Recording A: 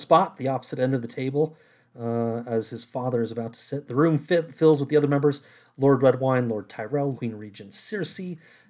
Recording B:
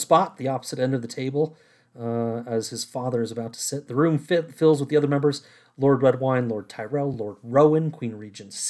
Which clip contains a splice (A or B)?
A